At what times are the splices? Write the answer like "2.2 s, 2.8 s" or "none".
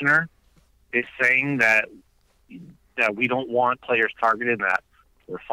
4.6 s

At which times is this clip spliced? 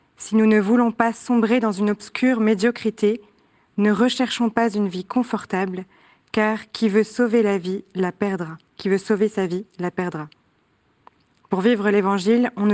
8.7 s

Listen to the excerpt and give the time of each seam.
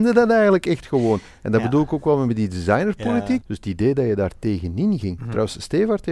3.4 s, 5.2 s

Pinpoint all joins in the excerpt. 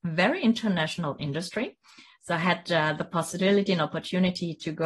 none

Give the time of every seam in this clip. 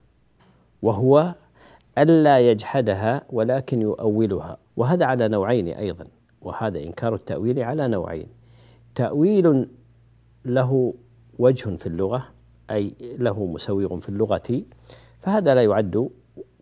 4.7 s

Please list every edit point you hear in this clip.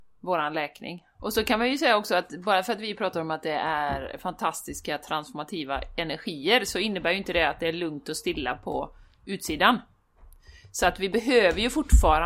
1.2 s

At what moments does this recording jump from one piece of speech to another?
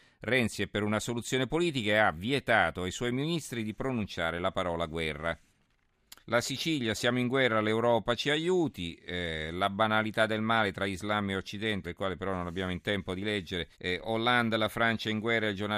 6.2 s, 11.8 s, 13.7 s

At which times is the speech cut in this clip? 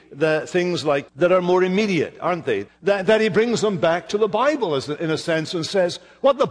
1.1 s, 2.7 s

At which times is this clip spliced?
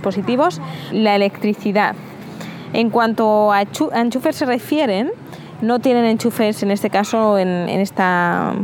0.9 s

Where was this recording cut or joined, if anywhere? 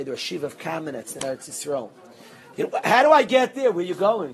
1.1 s, 2.5 s

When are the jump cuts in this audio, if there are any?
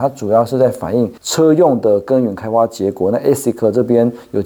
1.2 s

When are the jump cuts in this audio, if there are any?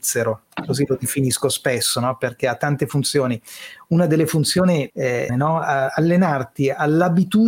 5.3 s

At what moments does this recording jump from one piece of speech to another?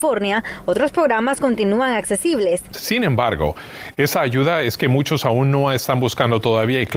2.7 s

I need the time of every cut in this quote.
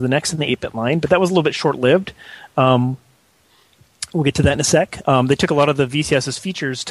5.0 s

